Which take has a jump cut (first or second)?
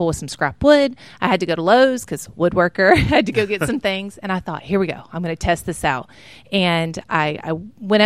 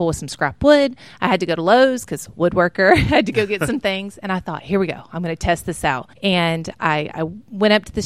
second